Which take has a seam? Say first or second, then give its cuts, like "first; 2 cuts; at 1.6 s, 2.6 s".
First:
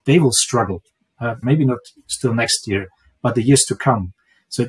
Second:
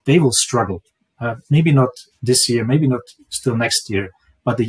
first; 1 cut; at 1.4 s